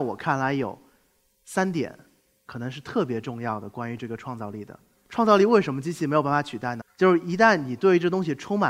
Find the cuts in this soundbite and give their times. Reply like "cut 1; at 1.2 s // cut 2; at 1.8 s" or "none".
cut 1; at 4.9 s // cut 2; at 6.8 s

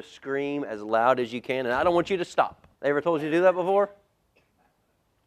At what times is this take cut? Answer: cut 1; at 2.7 s

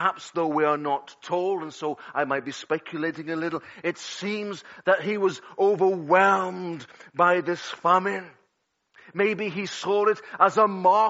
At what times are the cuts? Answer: none

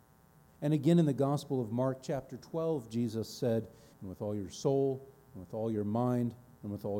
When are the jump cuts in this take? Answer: cut 1; at 3.9 s

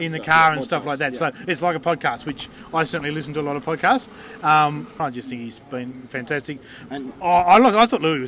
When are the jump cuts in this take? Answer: cut 1; at 5.0 s // cut 2; at 6.9 s

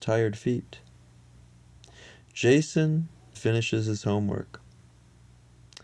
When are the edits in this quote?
cut 1; at 3.3 s

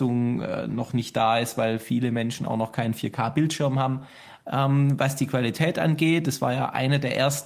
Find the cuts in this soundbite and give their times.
cut 1; at 4.4 s

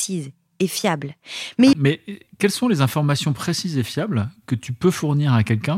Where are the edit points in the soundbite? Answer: cut 1; at 1.7 s

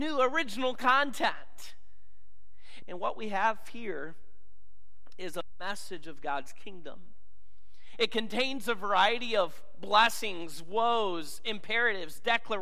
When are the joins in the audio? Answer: cut 1; at 2.8 s

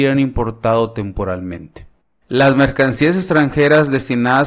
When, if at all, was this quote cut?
cut 1; at 2.2 s

